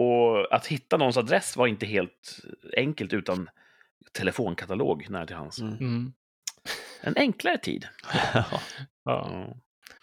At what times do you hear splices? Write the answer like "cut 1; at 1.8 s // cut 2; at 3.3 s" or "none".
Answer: none